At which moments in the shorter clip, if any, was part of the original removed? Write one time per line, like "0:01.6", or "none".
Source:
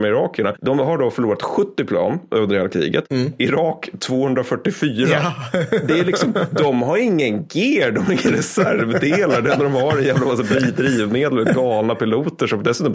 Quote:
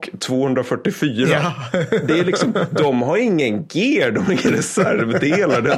none